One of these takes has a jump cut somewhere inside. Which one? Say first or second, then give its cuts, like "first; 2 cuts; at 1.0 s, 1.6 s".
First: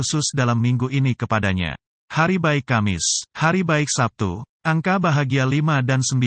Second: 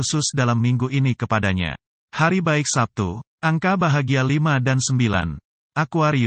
first; 2 cuts; at 2.0 s, 3.3 s